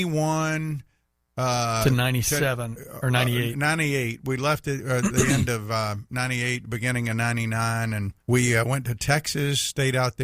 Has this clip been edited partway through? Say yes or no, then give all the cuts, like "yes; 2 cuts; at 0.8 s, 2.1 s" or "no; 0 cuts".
yes; 1 cut; at 8.2 s